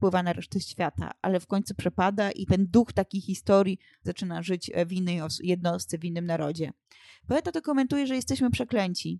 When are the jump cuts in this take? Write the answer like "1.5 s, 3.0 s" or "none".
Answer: 2.5 s